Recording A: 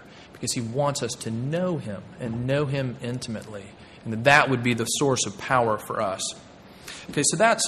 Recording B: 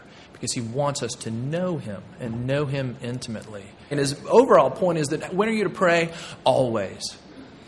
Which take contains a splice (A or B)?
B